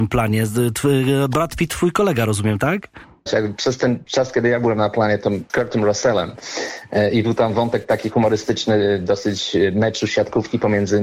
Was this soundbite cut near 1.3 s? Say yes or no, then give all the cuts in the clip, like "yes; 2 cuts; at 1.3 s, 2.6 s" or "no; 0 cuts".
no; 2 cuts; at 3.3 s, 5.5 s